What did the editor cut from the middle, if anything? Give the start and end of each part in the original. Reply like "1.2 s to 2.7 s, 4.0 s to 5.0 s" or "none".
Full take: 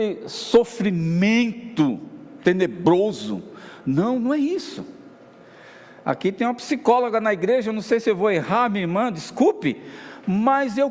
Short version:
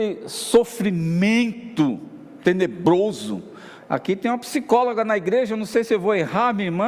3.8 s to 5.9 s